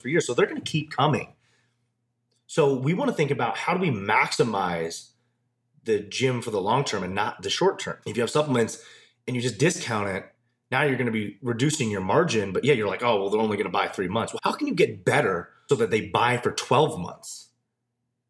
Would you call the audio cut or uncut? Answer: cut